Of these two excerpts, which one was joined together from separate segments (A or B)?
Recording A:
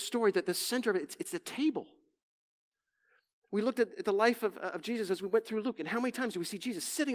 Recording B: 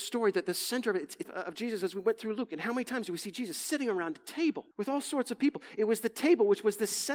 B